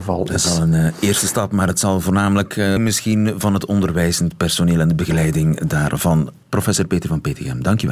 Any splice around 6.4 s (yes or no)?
yes